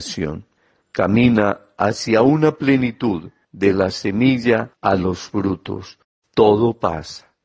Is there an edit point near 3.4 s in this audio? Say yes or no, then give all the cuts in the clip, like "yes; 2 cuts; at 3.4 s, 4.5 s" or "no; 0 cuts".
yes; 1 cut; at 3.4 s